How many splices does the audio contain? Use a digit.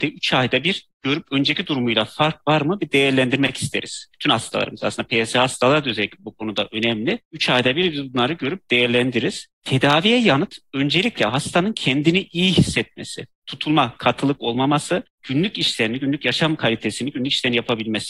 0